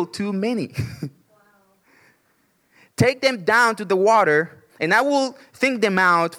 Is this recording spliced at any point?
no; 0 cuts

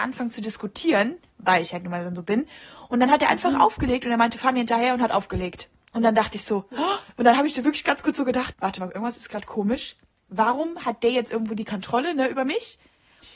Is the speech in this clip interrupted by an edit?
yes; 1 cut; at 8.5 s

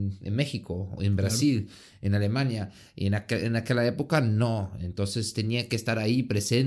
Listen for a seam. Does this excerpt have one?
no; 0 cuts

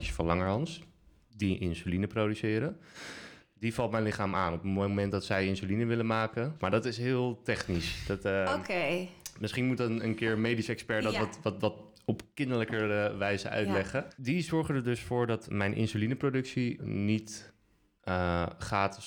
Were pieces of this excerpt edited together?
yes; 2 cuts; at 15.5 s, 16.8 s

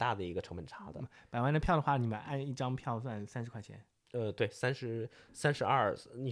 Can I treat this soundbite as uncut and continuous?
yes; 0 cuts

